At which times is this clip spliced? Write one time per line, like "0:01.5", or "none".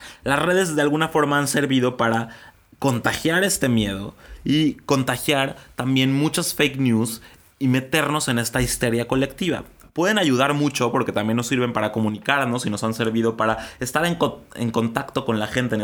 none